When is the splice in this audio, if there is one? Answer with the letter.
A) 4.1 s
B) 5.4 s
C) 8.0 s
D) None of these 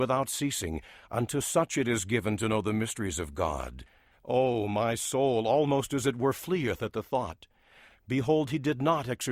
A